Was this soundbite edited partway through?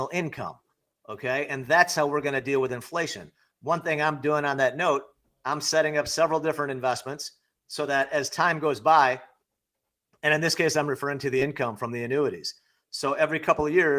no; 0 cuts

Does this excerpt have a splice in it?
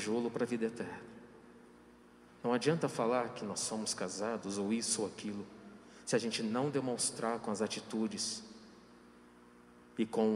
yes; 1 cut; at 2.3 s

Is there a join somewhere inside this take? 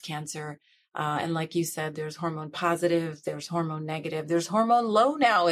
no; 0 cuts

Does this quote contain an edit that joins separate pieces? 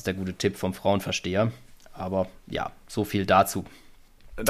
no; 0 cuts

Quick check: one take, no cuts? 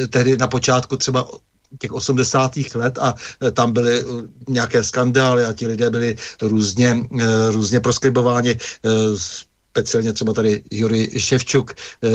yes; 0 cuts

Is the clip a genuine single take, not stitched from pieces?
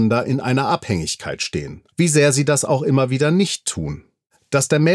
no; 1 cut; at 1.9 s

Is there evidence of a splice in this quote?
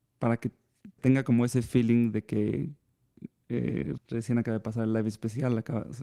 yes; 2 cuts; at 1.0 s, 4.0 s

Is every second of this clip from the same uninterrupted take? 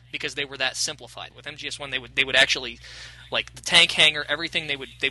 no; 1 cut; at 1.3 s

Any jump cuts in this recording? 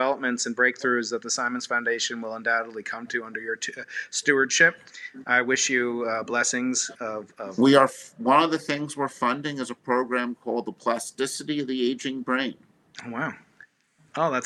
no; 0 cuts

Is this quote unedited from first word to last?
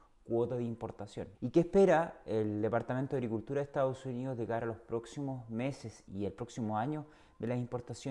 no; 2 cuts; at 1.3 s, 6.1 s

